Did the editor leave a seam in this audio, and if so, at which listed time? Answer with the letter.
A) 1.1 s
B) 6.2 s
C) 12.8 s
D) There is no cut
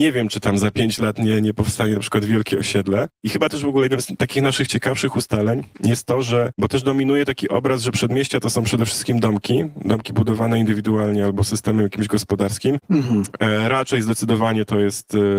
C